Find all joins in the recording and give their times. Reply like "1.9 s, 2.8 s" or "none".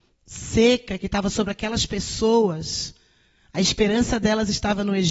none